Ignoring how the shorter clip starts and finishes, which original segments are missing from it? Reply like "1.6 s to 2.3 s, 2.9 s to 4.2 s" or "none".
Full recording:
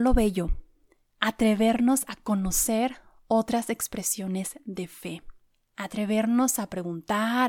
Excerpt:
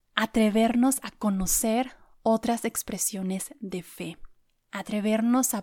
none